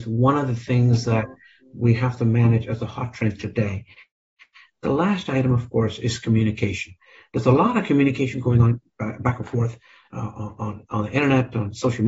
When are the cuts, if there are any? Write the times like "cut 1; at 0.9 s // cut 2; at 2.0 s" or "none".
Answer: none